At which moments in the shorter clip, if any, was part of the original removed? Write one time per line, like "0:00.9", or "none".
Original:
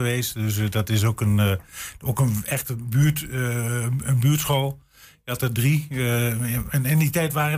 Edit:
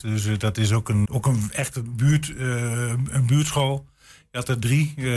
0:01.1